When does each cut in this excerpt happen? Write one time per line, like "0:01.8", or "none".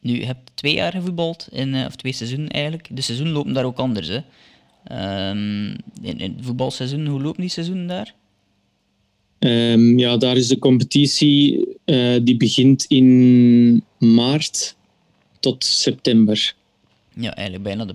0:11.8